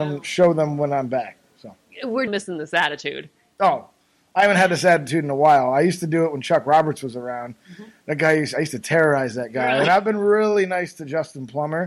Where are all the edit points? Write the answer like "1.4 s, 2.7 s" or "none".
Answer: 2.3 s